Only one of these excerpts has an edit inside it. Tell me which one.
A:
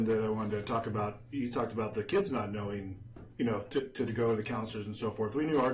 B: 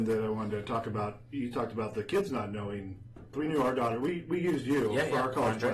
B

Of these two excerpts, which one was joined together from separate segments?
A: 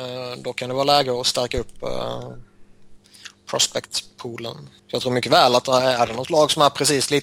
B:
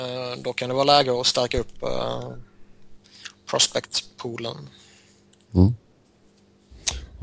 A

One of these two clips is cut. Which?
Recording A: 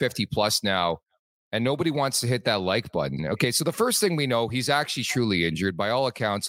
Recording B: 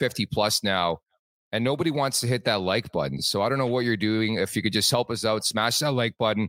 A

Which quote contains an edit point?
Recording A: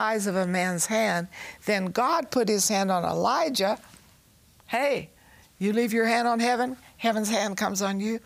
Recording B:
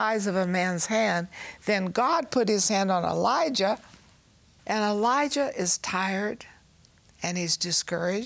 B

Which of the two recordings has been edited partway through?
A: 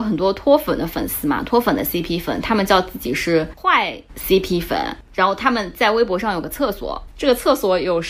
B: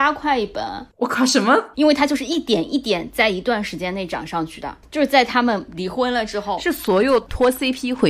B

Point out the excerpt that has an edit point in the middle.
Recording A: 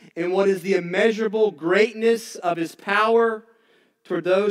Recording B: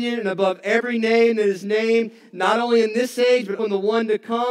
B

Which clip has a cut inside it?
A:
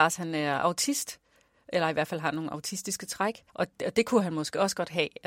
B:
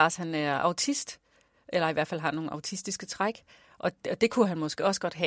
A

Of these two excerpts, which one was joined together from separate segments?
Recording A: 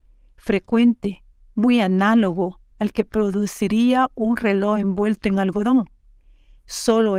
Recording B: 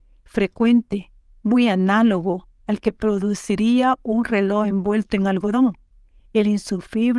B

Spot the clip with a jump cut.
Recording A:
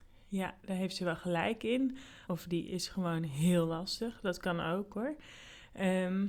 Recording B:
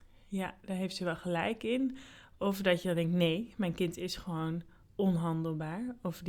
A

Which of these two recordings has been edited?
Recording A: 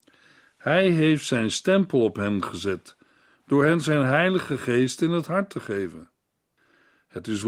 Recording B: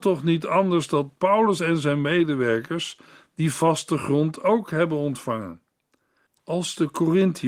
B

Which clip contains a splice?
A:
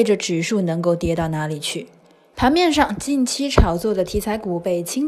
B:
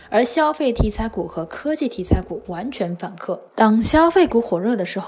B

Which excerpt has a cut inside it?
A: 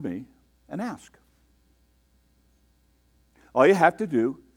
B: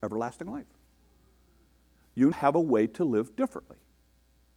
B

